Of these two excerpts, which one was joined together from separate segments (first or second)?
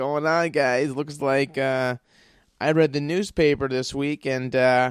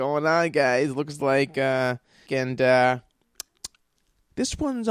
second